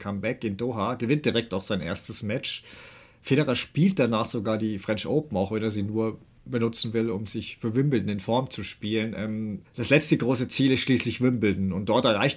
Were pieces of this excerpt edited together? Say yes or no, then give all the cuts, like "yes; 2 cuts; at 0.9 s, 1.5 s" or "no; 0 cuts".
yes; 1 cut; at 9.6 s